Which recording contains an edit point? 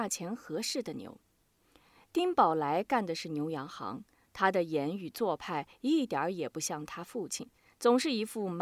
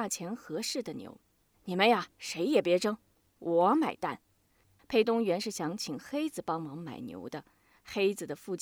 second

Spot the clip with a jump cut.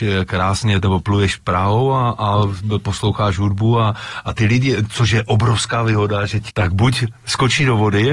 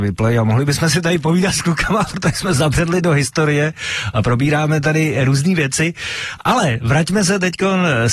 first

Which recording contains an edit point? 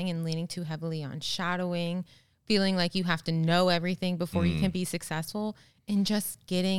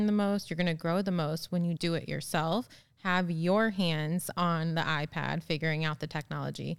second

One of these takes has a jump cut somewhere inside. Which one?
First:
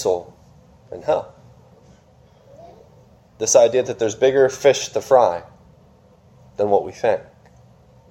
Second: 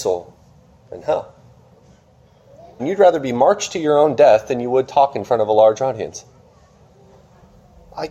second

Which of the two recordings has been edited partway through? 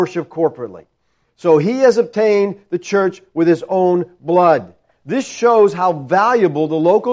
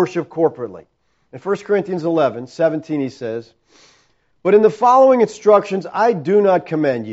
first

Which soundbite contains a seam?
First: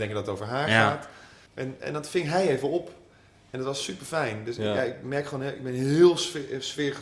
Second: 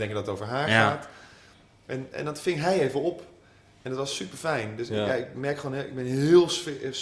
first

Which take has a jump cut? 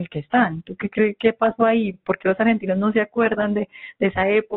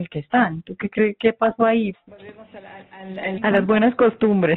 second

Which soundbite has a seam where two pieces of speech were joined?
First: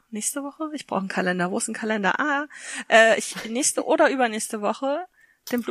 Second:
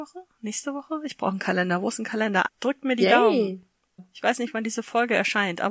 second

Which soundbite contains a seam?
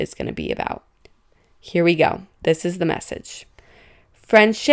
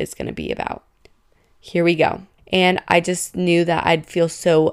second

